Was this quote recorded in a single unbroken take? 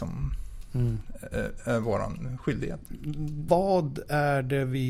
no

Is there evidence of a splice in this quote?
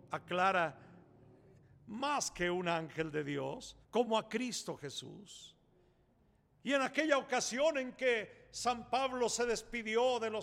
yes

